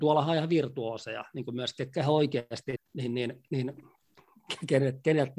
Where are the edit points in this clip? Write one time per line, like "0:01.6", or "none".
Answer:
0:02.8